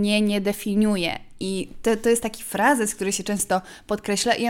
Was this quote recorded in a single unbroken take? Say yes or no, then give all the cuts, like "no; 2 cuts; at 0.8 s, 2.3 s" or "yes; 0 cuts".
yes; 0 cuts